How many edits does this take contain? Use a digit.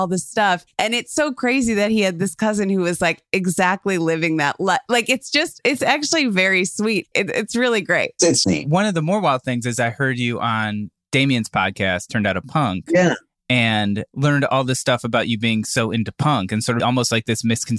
3